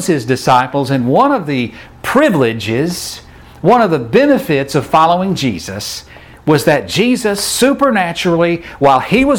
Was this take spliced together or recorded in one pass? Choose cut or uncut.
uncut